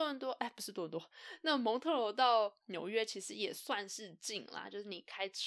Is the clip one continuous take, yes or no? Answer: yes